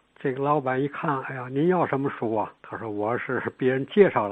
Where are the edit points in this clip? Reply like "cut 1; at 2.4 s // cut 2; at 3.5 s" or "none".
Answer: cut 1; at 2.6 s